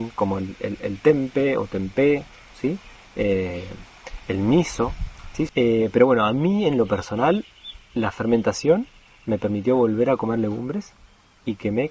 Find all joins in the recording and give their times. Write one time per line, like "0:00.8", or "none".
0:02.5
0:05.5